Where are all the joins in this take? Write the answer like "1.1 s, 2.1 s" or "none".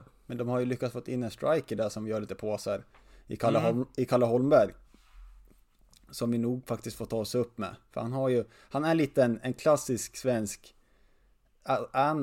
none